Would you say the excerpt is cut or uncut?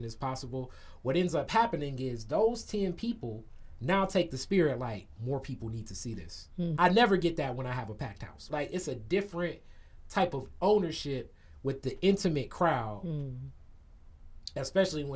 cut